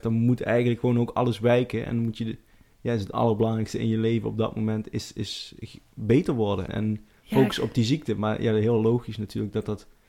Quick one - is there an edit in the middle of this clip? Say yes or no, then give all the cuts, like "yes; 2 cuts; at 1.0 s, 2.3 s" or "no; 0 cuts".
yes; 1 cut; at 6.7 s